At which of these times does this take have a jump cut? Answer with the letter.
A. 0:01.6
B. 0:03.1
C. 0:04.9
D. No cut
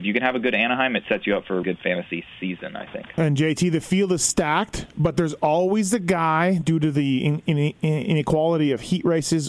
A